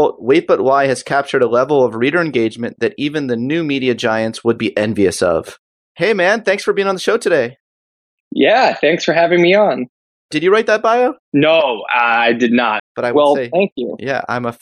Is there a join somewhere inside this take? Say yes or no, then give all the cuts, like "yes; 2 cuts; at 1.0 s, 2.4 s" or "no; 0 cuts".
yes; 2 cuts; at 11.2 s, 12.8 s